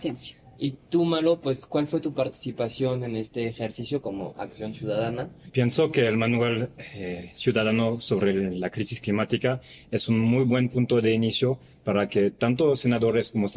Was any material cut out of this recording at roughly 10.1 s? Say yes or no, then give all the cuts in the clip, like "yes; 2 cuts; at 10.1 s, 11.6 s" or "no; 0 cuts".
no; 2 cuts; at 4.0 s, 5.5 s